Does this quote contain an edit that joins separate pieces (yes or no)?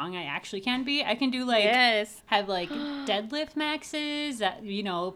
yes